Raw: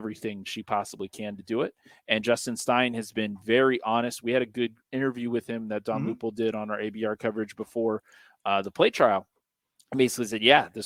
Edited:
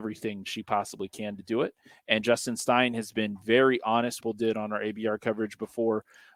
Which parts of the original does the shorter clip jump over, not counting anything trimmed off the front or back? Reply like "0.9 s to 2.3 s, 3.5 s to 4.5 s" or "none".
4.2 s to 6.2 s